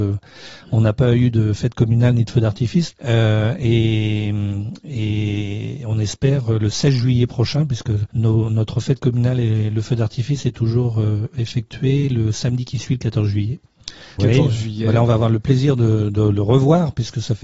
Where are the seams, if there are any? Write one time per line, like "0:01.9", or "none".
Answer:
0:02.9
0:08.1
0:14.2